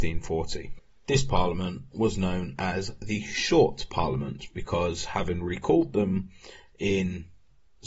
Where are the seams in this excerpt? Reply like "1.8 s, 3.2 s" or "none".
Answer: none